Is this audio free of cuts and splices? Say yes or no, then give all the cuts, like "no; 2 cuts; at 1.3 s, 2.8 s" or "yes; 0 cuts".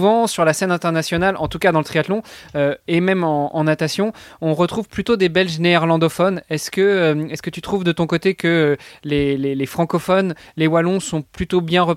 yes; 0 cuts